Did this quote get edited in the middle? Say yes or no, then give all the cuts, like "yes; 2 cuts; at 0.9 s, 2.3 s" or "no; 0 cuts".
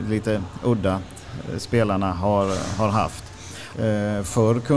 yes; 1 cut; at 3.7 s